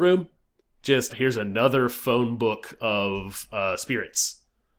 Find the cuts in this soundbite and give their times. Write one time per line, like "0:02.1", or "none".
0:01.1

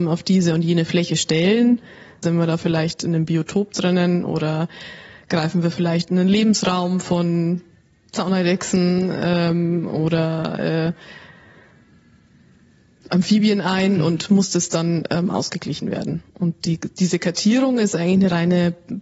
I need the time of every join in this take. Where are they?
0:02.2

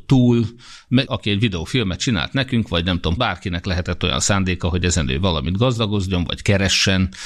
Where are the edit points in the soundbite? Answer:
0:01.0
0:03.2

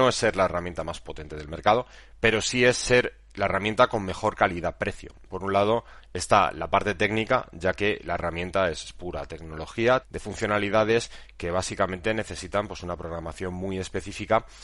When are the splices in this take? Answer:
0:05.3
0:10.0

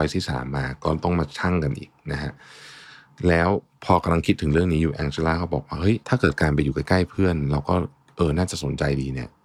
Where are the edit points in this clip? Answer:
0:06.0

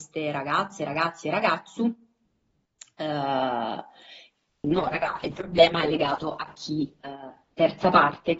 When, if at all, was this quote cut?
0:04.6

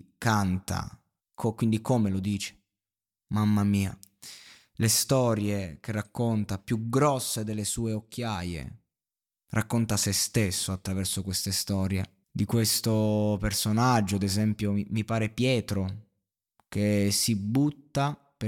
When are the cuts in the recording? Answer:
0:01.2
0:12.2

